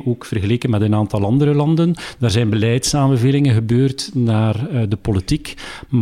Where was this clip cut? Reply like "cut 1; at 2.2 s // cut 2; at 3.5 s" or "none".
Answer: none